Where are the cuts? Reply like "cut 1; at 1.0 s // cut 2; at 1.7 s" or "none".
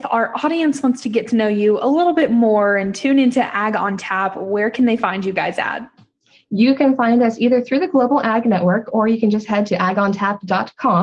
none